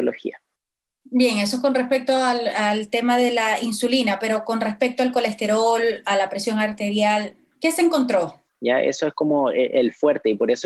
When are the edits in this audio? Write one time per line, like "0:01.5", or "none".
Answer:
0:08.4